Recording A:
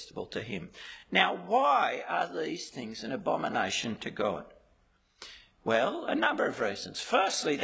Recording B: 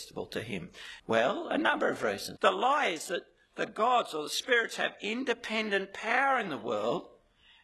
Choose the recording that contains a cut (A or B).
B